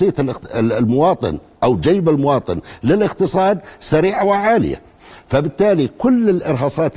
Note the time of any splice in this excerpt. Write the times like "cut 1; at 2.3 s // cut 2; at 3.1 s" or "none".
none